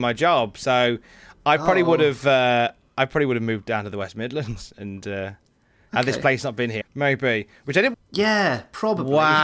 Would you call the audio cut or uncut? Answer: cut